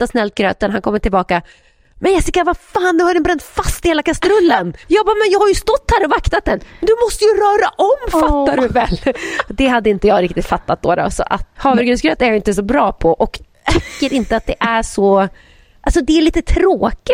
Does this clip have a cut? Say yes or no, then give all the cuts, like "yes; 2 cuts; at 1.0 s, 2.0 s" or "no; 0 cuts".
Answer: yes; 2 cuts; at 4.8 s, 11.6 s